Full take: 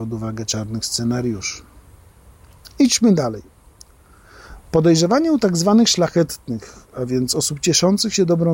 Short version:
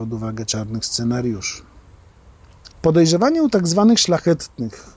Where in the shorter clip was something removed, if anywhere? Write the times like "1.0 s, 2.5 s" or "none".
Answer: 2.7 s